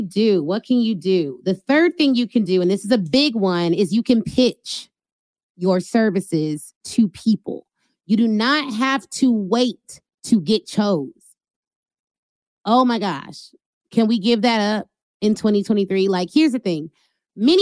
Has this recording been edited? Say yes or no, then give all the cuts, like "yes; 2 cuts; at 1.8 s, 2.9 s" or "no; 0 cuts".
no; 0 cuts